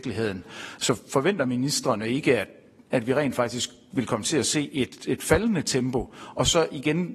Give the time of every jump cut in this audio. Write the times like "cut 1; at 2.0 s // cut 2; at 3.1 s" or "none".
none